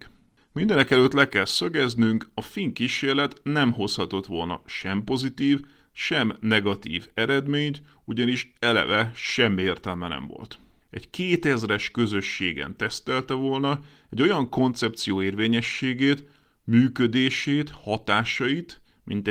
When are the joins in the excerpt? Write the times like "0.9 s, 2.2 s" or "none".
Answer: none

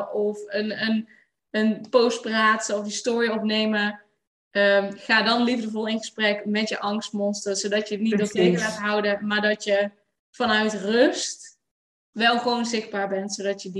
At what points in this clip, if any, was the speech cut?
none

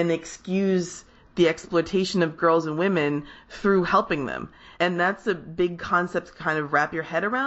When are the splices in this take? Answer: none

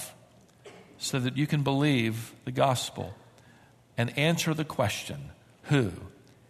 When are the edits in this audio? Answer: none

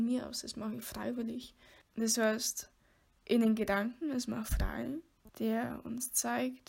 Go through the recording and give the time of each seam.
1.8 s, 5.3 s

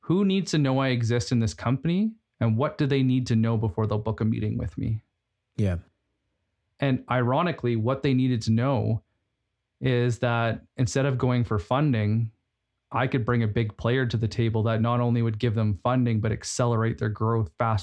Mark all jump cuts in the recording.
none

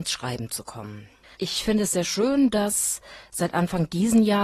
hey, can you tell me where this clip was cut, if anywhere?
1.3 s

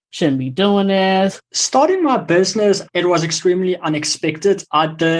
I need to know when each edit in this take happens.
1.4 s, 2.9 s

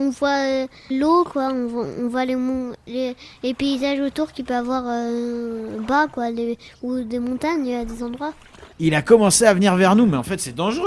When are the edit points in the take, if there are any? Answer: 0.9 s, 8.7 s

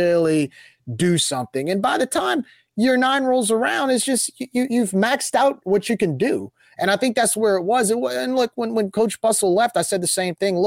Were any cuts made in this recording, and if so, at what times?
none

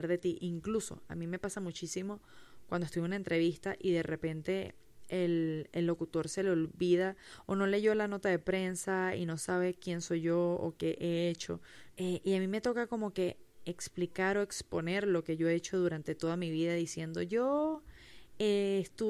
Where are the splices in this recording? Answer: 12.0 s

